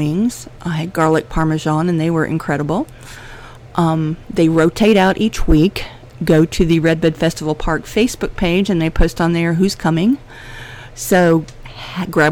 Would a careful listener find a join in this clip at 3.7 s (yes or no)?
no